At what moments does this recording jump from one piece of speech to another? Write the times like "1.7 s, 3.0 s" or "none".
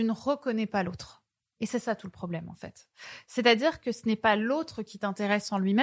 none